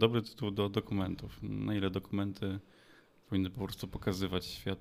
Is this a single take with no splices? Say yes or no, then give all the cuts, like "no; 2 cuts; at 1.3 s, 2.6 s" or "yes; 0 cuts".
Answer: yes; 0 cuts